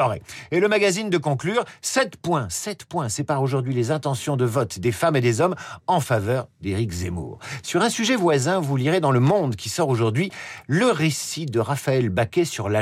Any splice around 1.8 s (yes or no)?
no